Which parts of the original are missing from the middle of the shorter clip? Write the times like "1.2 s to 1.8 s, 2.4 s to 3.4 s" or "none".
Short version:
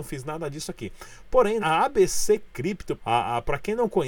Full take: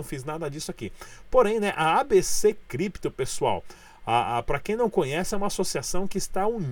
1.6 s to 1.7 s, 3.1 s to 4.0 s